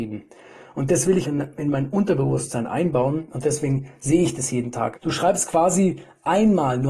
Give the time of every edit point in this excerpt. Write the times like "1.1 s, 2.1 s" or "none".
1.2 s, 4.9 s